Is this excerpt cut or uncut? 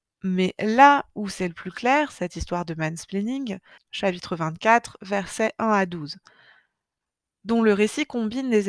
cut